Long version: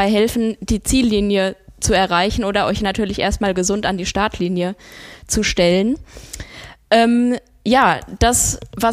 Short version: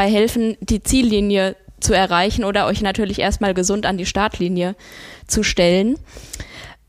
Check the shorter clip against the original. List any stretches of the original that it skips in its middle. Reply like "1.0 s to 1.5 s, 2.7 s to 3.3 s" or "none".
none